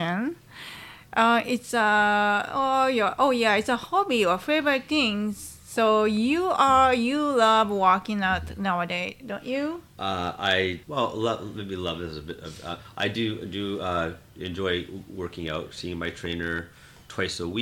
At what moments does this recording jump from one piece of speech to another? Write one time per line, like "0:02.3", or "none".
0:10.8